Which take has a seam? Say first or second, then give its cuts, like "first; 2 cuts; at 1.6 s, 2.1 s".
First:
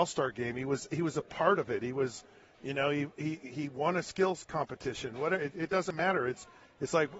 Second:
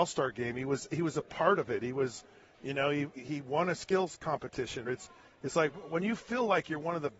second; 2 cuts; at 3.1 s, 4.9 s